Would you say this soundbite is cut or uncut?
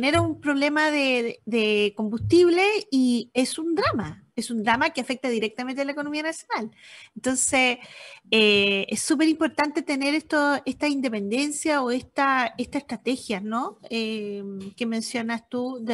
uncut